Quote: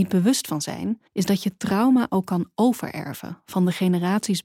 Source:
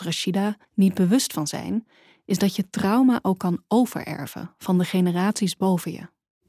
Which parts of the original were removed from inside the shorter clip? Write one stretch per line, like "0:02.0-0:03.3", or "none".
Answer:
0:01.9-0:02.2